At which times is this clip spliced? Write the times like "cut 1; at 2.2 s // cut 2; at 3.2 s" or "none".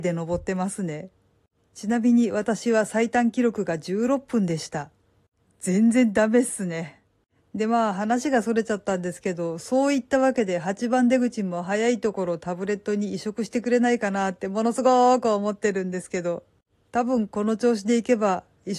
none